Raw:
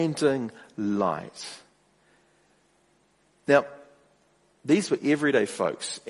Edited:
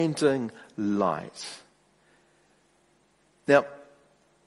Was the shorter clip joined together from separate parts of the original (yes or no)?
no